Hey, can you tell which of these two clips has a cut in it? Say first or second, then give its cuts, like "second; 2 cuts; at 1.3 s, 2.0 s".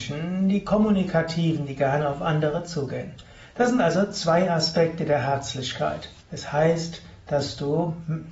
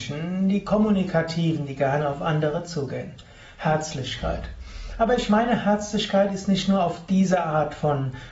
first; 2 cuts; at 3.5 s, 6.2 s